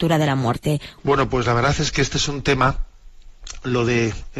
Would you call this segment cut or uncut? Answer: cut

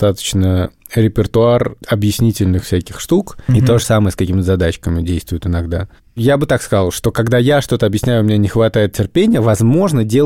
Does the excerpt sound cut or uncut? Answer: cut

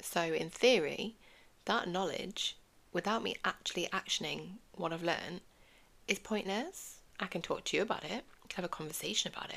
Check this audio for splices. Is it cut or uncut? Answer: uncut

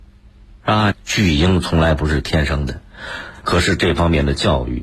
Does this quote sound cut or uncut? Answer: cut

